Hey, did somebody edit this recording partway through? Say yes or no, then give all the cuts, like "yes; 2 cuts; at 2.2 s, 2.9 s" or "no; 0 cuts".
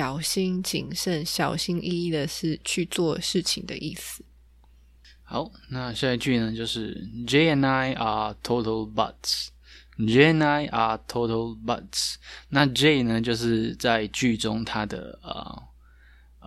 no; 0 cuts